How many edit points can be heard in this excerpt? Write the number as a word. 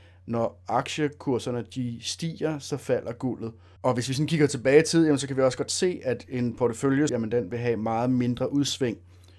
two